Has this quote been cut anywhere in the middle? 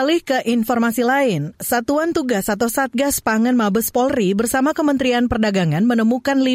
no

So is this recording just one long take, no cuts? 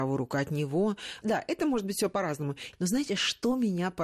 no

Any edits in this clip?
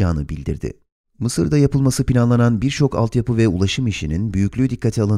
yes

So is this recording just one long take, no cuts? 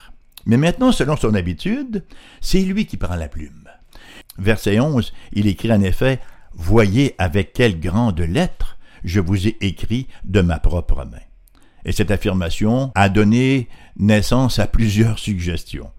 no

